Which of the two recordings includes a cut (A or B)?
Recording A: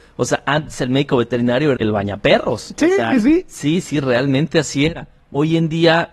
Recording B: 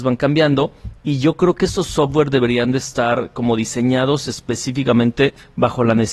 A